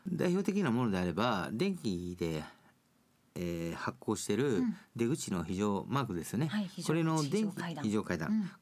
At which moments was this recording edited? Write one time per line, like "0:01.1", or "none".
none